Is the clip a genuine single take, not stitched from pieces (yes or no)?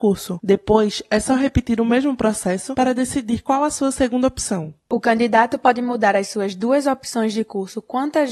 yes